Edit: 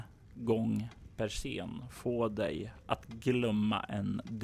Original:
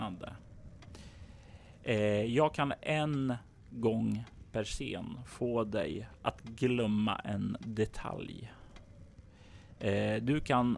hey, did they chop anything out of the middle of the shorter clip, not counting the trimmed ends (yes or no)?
no